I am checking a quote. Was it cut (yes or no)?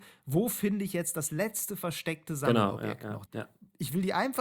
yes